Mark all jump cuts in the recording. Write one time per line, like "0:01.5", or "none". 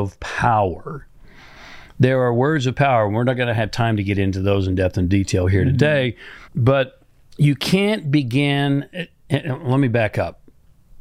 0:06.5